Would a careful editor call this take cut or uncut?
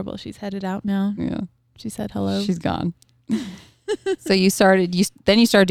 uncut